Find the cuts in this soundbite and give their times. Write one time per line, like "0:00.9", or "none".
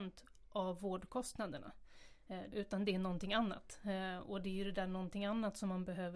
0:02.5